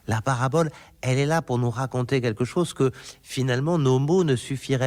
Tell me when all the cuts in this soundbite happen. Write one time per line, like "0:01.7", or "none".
none